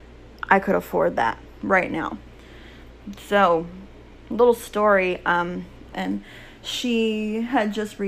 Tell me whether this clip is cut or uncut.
cut